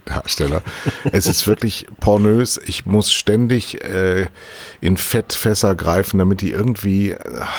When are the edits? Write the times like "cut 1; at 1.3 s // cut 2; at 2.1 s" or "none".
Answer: none